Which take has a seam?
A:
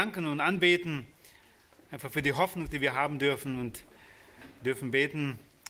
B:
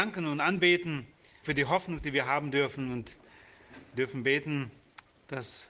B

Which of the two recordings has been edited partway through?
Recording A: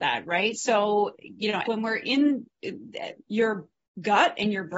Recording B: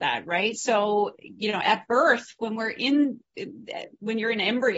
A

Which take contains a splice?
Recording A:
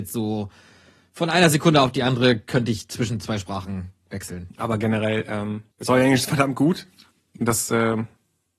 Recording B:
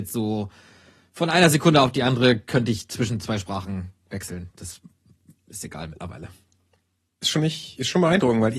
A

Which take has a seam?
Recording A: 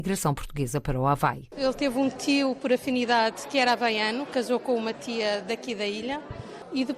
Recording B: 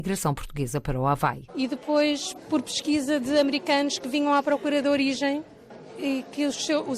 B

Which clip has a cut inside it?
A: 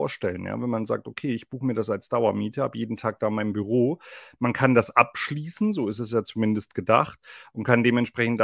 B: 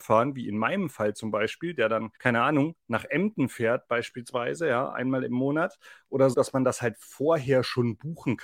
B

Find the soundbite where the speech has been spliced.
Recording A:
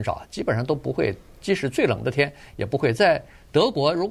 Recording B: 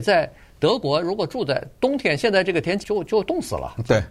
B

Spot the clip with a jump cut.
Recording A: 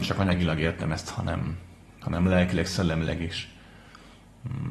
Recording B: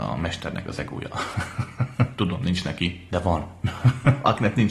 B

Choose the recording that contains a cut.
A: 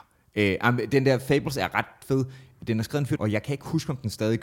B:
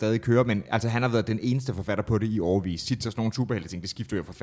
A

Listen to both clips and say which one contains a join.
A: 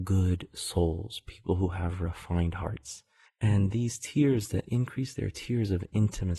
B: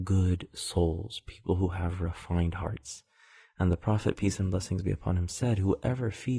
A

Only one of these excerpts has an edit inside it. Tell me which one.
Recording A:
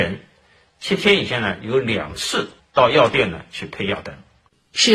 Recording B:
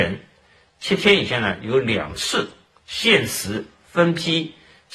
A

